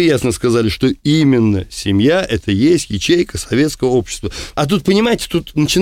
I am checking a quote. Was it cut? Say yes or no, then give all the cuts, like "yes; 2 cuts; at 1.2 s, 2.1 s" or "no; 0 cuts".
yes; 1 cut; at 4.5 s